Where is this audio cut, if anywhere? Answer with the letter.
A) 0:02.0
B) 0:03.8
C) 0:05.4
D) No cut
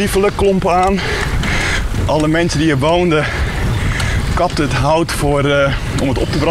A